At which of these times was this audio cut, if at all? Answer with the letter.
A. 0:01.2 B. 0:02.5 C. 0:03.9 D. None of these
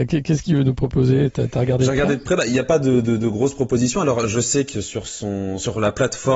D